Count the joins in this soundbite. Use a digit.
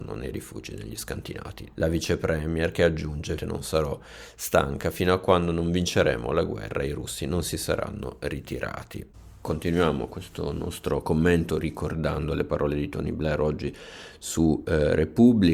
2